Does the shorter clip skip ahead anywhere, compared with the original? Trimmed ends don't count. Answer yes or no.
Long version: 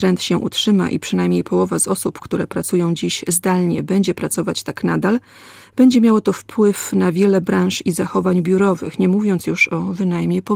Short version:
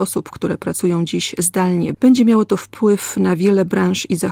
yes